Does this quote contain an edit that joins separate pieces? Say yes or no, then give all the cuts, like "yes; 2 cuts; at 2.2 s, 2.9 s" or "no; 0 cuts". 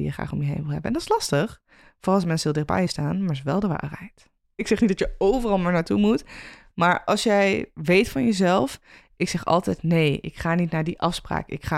yes; 1 cut; at 4.6 s